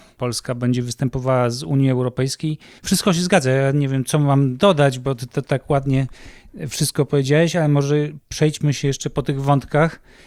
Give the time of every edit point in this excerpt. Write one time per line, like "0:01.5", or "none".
0:02.8